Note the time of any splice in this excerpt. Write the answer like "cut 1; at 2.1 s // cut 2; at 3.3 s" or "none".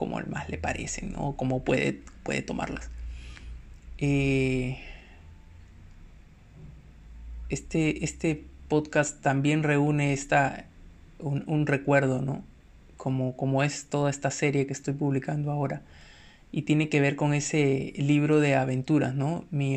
none